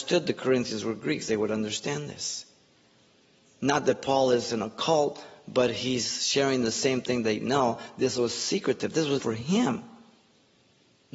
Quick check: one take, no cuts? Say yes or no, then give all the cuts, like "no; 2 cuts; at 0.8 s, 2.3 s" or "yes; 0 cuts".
no; 1 cut; at 9.2 s